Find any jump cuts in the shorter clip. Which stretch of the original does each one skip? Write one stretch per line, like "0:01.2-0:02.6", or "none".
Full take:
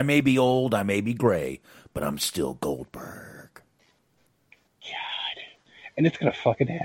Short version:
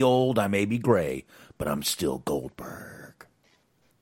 none